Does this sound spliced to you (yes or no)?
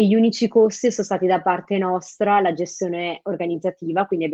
no